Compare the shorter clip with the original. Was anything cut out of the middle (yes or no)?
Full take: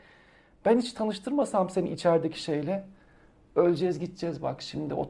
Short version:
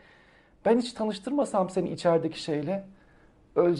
no